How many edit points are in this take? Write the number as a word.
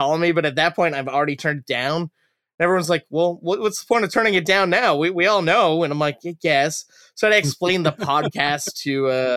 zero